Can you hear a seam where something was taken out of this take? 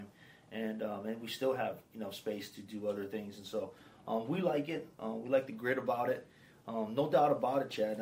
no; 0 cuts

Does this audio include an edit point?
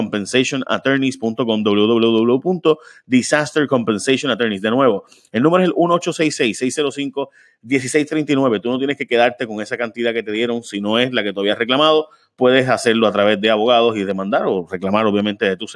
no; 0 cuts

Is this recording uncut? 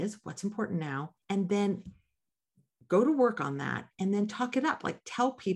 no; 1 cut; at 1.2 s

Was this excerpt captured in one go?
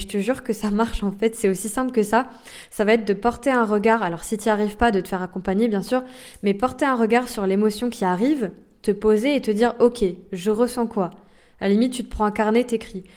yes; 0 cuts

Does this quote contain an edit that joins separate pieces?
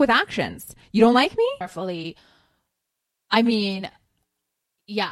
yes; 1 cut; at 1.6 s

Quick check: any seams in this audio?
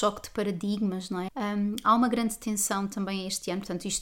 yes; 1 cut; at 1.3 s

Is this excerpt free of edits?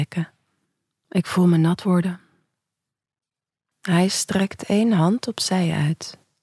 no; 2 cuts; at 1.0 s, 3.7 s

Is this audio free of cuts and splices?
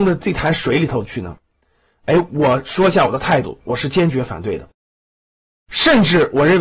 yes; 0 cuts

